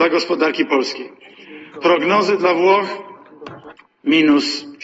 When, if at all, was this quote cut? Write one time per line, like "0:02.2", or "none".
none